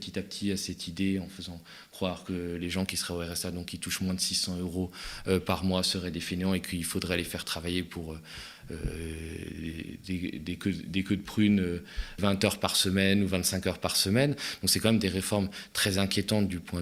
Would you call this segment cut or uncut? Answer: cut